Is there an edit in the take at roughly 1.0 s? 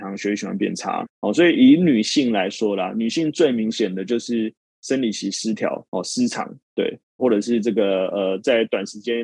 yes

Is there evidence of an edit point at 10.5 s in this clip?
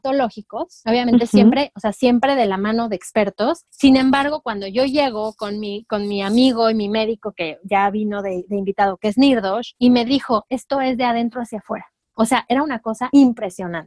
yes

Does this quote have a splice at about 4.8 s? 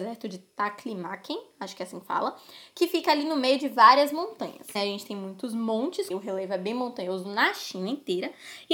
yes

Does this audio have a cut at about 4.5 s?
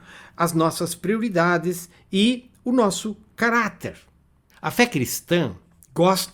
yes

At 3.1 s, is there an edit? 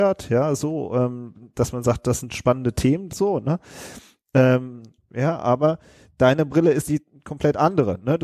yes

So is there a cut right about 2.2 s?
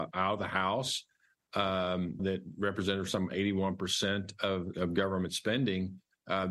yes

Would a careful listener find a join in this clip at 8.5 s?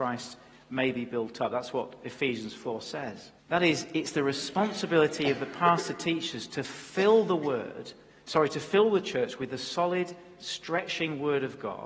no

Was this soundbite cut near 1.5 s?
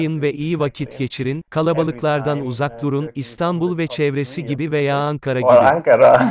no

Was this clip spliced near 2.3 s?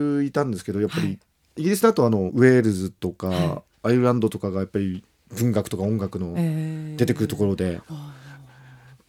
yes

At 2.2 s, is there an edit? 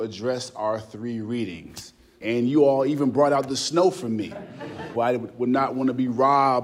yes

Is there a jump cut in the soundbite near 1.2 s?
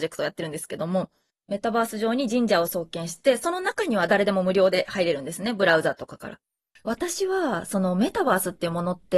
no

